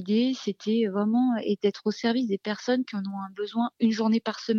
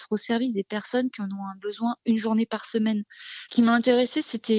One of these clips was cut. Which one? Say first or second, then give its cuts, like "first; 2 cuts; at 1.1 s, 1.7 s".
second; 1 cut; at 3.5 s